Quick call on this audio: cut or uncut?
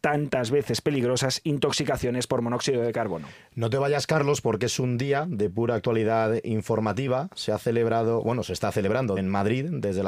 cut